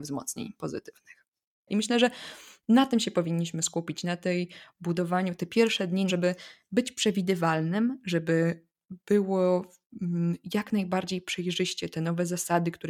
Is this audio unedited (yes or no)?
no